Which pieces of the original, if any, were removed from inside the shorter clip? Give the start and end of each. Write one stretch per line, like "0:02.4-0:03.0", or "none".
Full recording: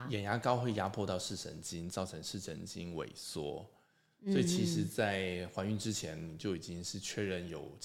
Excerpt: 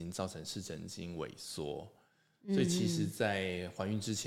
none